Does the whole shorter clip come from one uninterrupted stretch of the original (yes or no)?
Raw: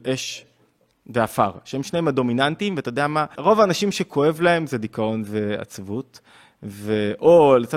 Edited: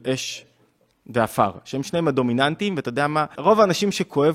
yes